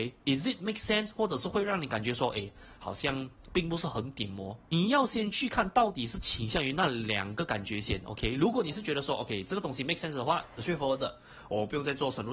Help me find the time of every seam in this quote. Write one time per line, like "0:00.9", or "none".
none